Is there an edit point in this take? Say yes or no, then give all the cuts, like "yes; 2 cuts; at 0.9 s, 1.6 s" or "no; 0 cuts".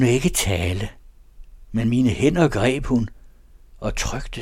yes; 1 cut; at 1.6 s